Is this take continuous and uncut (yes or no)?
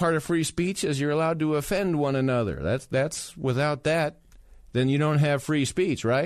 yes